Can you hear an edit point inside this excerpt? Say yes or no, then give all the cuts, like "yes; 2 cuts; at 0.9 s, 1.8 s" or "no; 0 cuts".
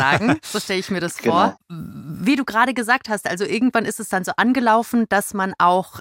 yes; 1 cut; at 1.6 s